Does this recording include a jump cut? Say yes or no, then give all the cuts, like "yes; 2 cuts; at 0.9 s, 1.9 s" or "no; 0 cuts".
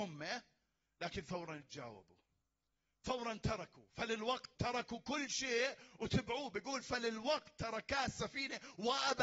yes; 1 cut; at 4.5 s